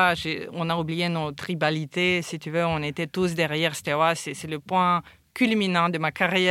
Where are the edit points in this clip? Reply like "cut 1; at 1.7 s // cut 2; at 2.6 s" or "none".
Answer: none